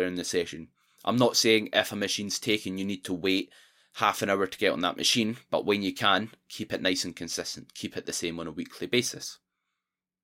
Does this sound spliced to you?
no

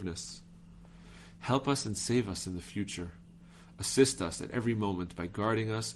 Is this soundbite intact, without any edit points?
yes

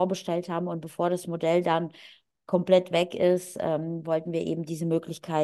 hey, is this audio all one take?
yes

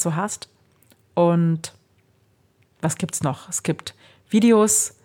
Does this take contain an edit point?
no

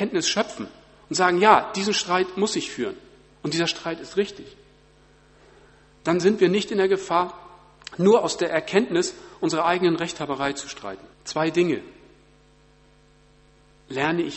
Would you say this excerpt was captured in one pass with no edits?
no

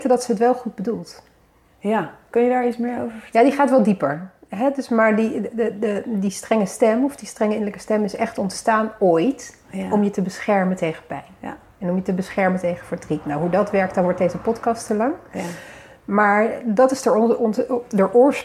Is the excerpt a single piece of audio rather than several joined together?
yes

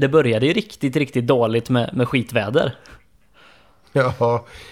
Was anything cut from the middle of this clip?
no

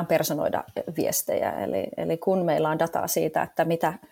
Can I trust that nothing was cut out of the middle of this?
yes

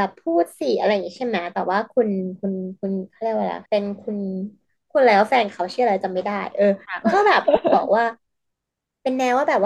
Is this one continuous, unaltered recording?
no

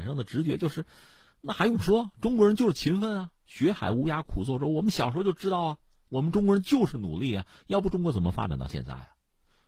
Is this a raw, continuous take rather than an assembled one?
yes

